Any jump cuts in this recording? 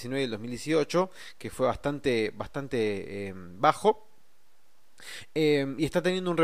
no; 0 cuts

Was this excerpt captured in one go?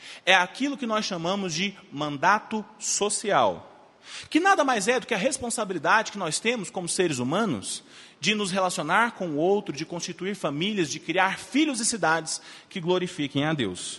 yes; 0 cuts

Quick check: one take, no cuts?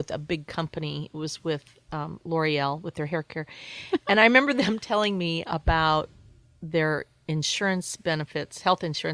yes; 0 cuts

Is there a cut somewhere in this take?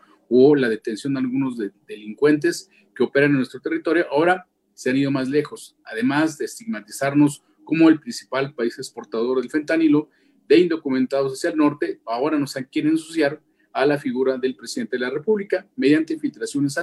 no; 0 cuts

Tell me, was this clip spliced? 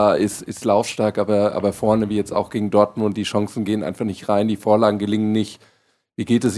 no; 0 cuts

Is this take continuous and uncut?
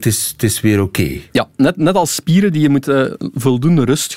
yes; 0 cuts

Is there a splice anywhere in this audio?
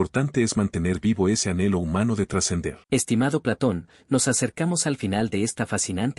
yes; 1 cut; at 2.8 s

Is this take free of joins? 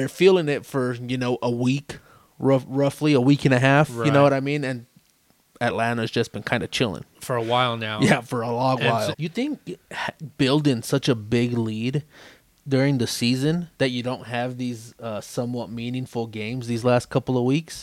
no; 2 cuts; at 9.1 s, 13.7 s

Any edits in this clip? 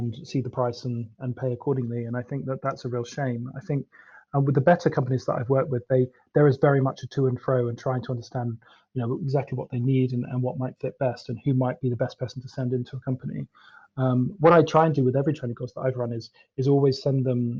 no; 0 cuts

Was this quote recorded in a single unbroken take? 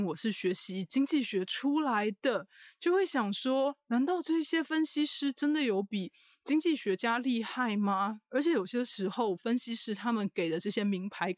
yes; 0 cuts

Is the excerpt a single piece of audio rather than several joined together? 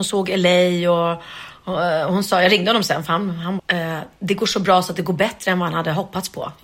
no; 1 cut; at 3.6 s

